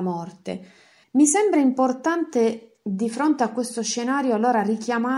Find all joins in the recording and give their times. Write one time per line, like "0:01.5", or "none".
0:01.0